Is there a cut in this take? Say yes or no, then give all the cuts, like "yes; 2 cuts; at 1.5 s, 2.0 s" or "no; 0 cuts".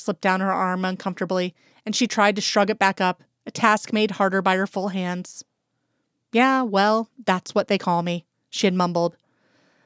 no; 0 cuts